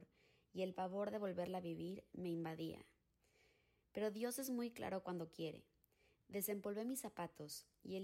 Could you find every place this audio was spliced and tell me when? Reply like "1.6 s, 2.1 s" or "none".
6.2 s